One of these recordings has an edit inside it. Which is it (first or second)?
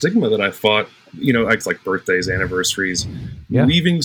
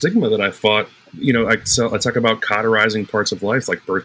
first